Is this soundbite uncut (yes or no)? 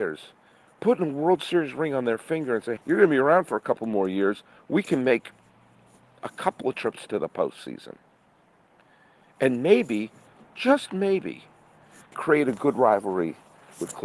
no